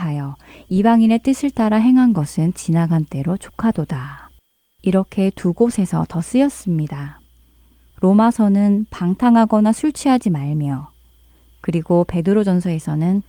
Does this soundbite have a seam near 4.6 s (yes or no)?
no